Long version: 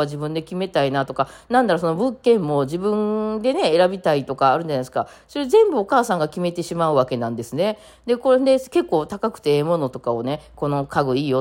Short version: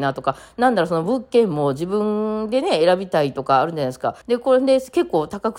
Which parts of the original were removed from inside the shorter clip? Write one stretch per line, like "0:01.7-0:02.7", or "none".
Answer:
0:05.1-0:08.0